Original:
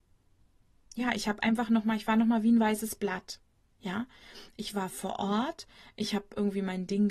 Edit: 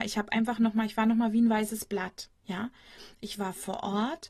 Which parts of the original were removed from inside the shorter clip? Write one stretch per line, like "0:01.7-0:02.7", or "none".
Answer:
0:03.5-0:03.7